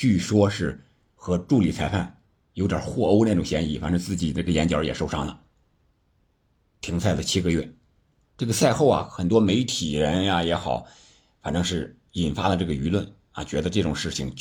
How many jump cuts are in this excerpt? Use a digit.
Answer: 1